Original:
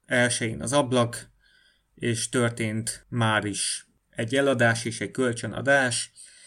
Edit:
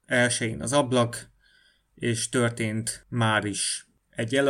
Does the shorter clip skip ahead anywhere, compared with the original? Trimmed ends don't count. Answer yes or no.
no